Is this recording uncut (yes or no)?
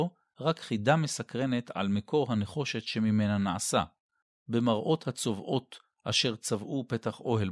yes